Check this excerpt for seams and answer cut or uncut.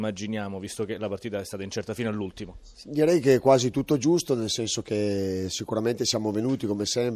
uncut